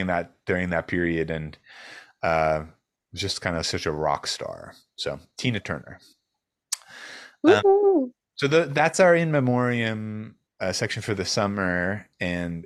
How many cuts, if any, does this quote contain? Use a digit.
1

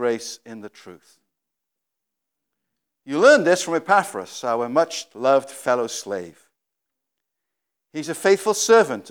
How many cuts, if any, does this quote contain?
0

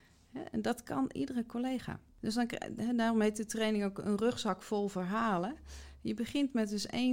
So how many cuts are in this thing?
1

